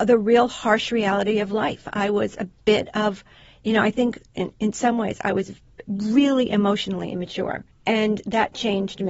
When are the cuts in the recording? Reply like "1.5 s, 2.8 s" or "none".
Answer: none